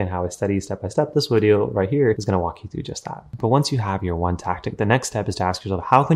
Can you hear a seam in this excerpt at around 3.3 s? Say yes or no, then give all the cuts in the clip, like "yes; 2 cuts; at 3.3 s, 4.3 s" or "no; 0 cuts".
no; 0 cuts